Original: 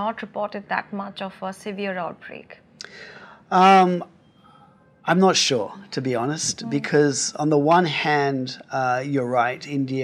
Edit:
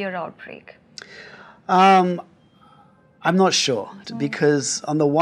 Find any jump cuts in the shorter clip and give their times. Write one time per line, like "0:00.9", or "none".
0:04.0